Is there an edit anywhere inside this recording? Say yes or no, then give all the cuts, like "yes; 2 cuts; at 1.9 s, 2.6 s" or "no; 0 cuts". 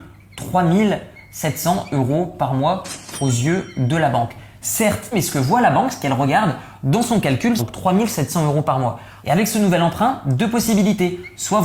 yes; 3 cuts; at 5.1 s, 7.6 s, 9.2 s